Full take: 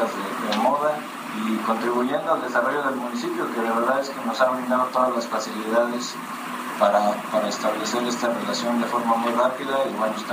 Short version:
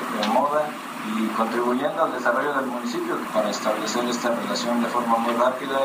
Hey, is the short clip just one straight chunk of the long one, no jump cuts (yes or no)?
no